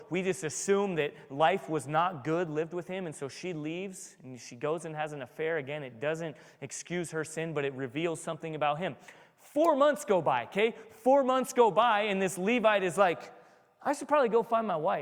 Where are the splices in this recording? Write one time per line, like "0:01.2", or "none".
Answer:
none